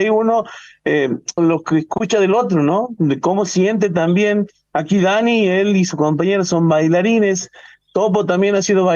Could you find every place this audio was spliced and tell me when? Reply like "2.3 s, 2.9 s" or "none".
1.4 s